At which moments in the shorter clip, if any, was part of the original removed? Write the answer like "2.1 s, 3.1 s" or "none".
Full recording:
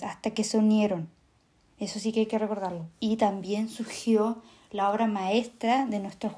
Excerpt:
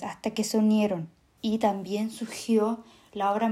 1.4 s